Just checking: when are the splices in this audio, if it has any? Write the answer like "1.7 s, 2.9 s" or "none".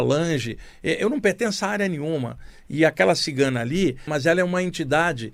4.1 s